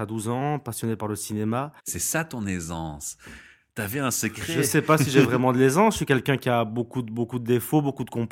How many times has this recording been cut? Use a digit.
1